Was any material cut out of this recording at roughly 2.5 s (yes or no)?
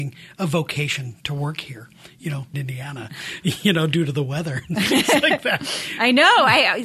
yes